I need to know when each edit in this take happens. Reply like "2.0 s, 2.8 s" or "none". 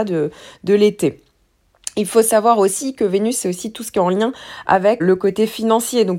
5.0 s